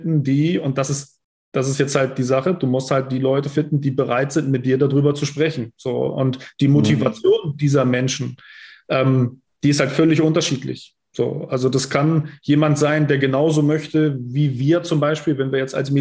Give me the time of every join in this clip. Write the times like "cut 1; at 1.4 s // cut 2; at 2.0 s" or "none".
none